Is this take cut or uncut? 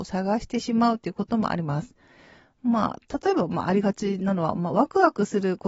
uncut